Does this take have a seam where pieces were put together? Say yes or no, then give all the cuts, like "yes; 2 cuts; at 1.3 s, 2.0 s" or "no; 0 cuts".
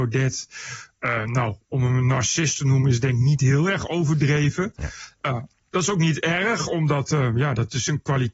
no; 0 cuts